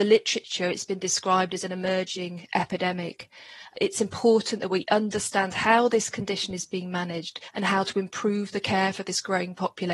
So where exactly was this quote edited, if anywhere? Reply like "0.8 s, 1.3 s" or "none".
7.5 s